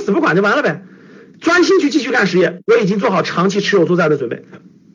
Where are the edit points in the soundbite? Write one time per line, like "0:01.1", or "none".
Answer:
none